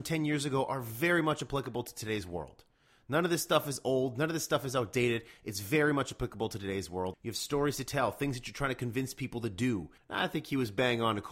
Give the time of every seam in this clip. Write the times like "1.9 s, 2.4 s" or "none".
7.1 s, 10.0 s